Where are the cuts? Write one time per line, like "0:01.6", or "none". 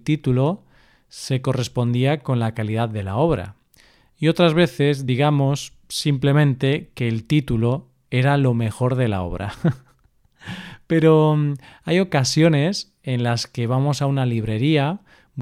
none